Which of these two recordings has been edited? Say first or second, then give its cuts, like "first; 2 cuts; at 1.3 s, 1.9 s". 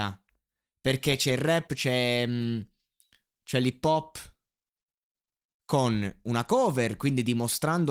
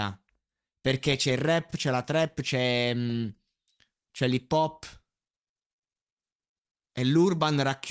first; 2 cuts; at 1.7 s, 5.5 s